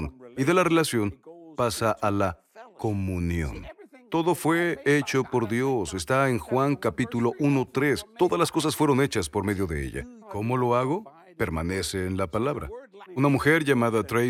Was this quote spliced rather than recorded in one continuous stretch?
yes; 2 cuts; at 10.2 s, 13.1 s

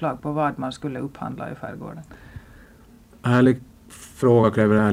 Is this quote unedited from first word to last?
yes; 0 cuts

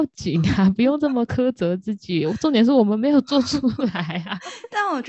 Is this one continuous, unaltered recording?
yes; 0 cuts

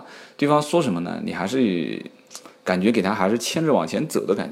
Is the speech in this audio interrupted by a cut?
no; 0 cuts

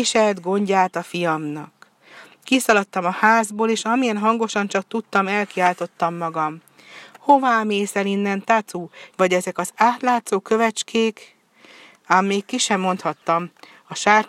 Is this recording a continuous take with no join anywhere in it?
no; 1 cut; at 9.1 s

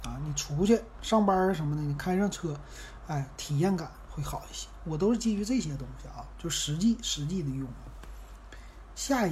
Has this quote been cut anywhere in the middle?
no; 0 cuts

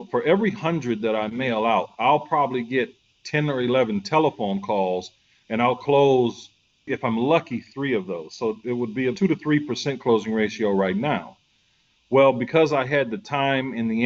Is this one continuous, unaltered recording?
yes; 0 cuts

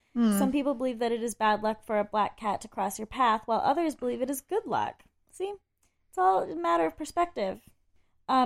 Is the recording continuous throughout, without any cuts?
yes; 0 cuts

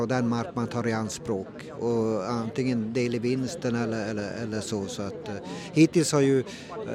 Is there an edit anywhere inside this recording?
no; 0 cuts

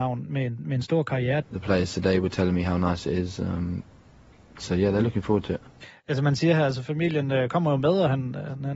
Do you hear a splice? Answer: yes; 1 cut; at 1.4 s

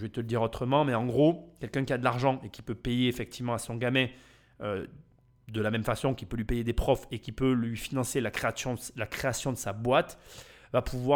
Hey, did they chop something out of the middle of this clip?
no; 0 cuts

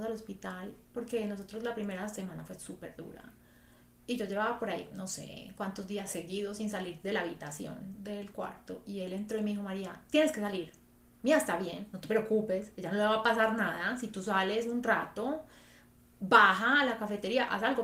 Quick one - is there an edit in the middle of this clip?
no; 0 cuts

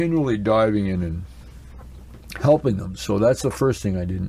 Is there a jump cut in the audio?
no; 0 cuts

